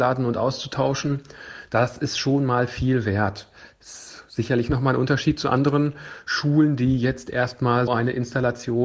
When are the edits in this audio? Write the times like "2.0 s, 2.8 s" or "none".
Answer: 7.9 s

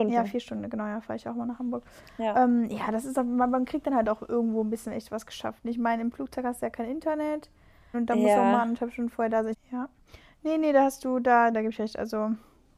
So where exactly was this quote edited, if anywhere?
7.9 s, 9.5 s, 11.5 s

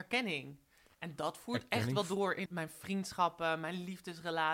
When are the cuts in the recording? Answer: 2.5 s

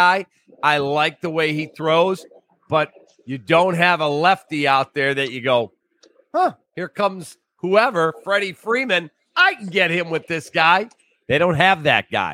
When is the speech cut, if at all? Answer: none

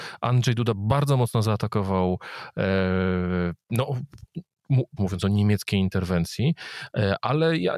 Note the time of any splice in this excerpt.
5.0 s

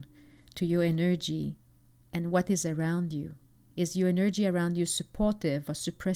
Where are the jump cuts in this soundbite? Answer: none

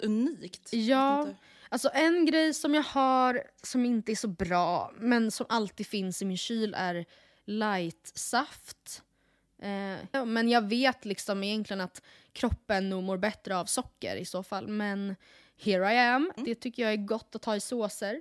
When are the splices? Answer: 10.1 s, 16.4 s

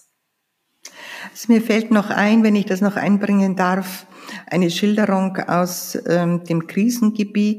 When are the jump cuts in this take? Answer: none

